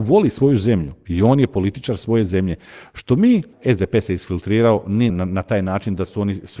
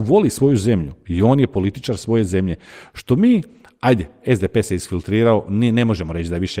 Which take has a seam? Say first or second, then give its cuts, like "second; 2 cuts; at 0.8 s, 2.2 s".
first; 2 cuts; at 3.5 s, 5.1 s